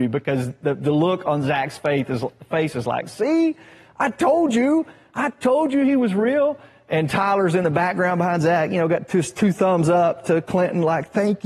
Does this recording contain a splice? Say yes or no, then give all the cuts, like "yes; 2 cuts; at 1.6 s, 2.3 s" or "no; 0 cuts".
no; 0 cuts